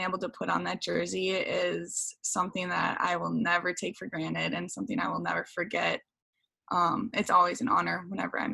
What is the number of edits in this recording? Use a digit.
0